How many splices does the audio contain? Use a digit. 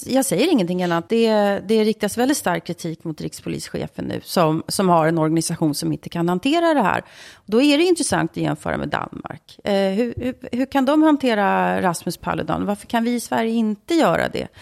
1